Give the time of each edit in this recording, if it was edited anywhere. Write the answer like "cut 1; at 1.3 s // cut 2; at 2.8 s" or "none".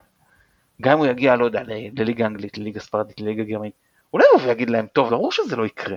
cut 1; at 5.1 s